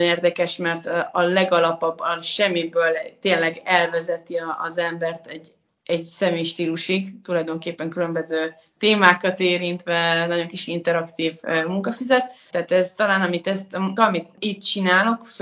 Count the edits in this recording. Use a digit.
2